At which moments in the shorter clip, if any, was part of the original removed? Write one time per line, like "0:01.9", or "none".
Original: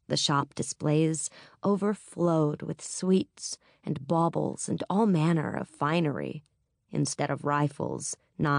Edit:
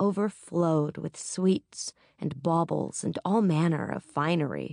none